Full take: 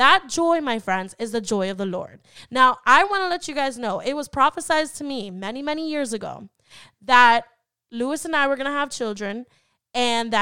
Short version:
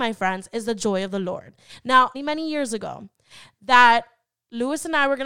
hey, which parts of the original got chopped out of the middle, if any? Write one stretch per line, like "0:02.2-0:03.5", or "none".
0:02.8-0:05.5

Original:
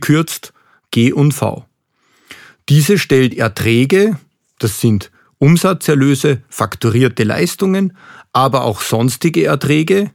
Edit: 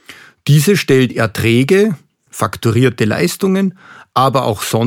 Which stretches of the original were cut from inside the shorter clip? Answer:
0:04.5-0:06.5

